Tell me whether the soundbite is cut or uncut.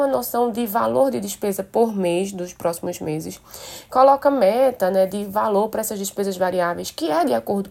uncut